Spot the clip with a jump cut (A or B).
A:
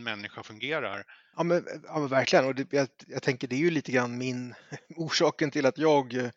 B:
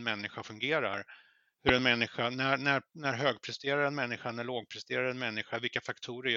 A